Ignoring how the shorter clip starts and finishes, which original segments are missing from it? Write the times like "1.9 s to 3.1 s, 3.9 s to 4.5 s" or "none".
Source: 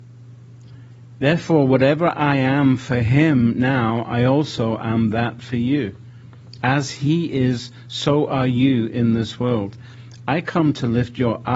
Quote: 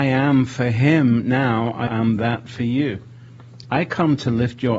4.2 s to 4.8 s, 6.6 s to 10.2 s